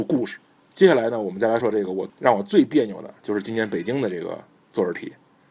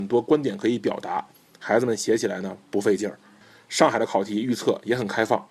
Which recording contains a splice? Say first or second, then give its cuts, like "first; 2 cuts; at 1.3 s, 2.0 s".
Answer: first; 1 cut; at 1.6 s